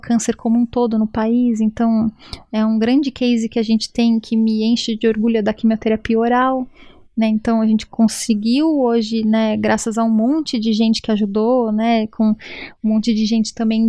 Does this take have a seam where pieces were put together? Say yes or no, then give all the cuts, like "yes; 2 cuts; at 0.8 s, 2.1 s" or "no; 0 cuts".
no; 0 cuts